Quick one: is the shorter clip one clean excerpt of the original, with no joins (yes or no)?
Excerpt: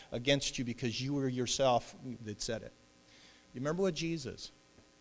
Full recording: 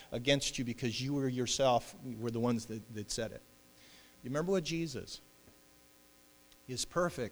no